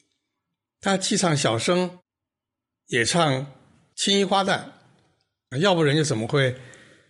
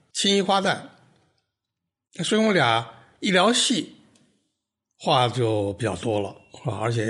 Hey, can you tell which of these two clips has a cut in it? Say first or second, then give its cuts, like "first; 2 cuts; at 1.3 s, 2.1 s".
first; 1 cut; at 5.5 s